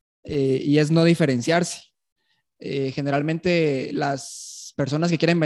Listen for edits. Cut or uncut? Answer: uncut